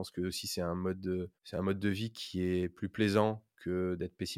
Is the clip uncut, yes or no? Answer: no